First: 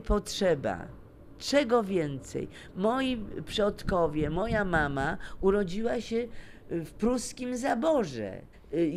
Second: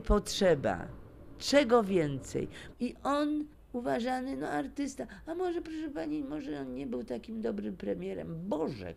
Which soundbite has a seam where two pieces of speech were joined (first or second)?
second